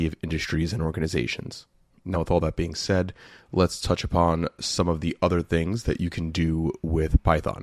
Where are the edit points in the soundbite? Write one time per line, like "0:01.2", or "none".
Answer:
none

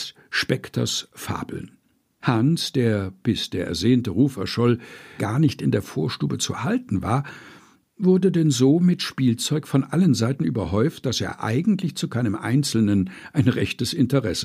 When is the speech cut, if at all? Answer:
0:02.2
0:05.2

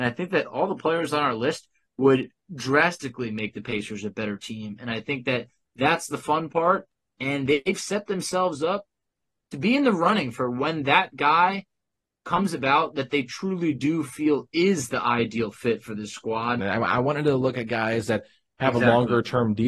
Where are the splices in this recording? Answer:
0:16.6

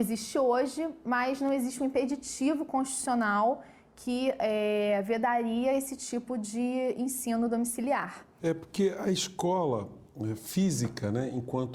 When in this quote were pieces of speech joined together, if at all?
0:08.4

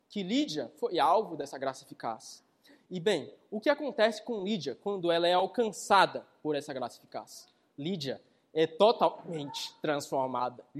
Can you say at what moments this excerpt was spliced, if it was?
none

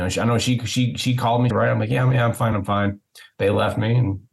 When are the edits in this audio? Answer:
0:01.5
0:02.5

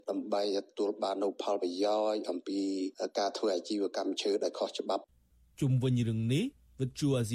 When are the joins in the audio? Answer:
none

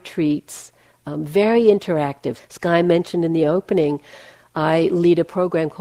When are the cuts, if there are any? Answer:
0:02.4

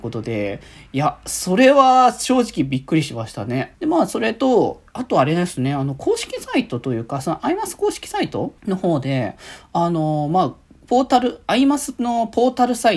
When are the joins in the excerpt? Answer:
0:03.7
0:08.6

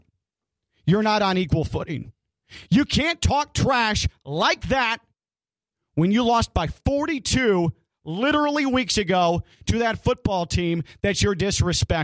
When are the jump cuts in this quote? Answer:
none

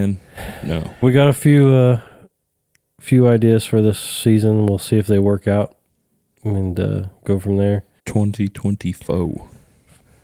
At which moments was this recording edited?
0:01.0
0:08.0

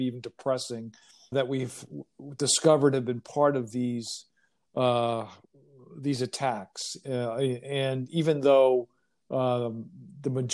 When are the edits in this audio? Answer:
0:01.3

